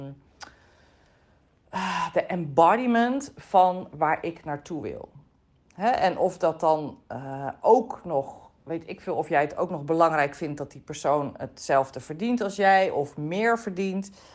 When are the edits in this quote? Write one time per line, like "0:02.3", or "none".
none